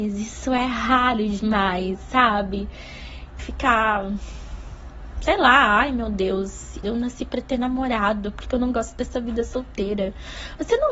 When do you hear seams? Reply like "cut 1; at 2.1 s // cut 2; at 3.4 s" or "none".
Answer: cut 1; at 3.4 s // cut 2; at 6.8 s